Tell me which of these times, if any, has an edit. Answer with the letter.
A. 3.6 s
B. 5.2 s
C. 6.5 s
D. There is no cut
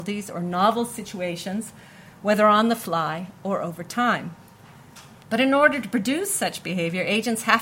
B